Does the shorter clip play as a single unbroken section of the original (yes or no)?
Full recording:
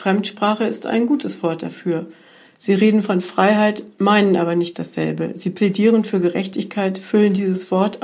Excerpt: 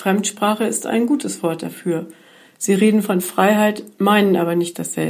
yes